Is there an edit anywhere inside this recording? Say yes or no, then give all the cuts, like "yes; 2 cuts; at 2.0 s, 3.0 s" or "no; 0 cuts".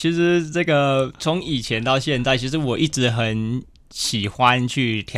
yes; 1 cut; at 1.2 s